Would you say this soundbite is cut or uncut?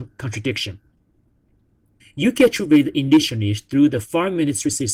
cut